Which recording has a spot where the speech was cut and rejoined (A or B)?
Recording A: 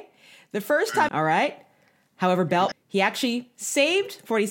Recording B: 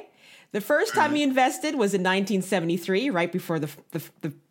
A